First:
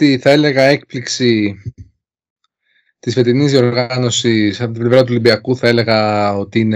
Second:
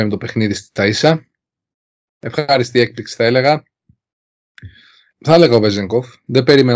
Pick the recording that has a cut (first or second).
second